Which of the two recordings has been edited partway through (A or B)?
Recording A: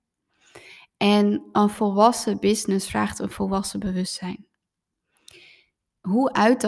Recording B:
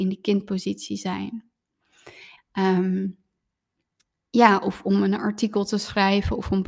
B